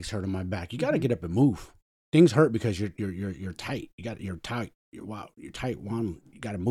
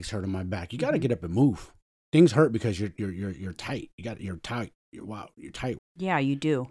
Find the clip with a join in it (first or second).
second